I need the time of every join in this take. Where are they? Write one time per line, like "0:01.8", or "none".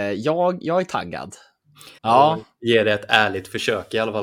0:02.0